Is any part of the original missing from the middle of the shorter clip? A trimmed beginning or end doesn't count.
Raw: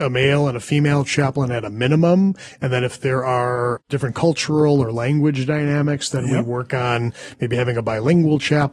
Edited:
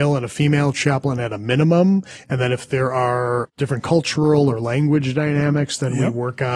no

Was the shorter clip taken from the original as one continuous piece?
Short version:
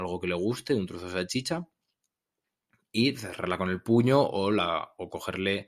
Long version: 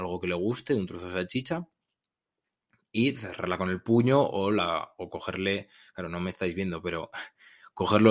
yes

